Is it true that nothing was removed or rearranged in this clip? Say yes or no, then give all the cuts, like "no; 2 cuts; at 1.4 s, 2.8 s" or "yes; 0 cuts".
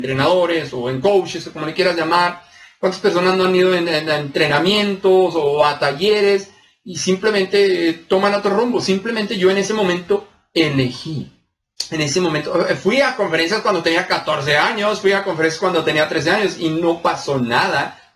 yes; 0 cuts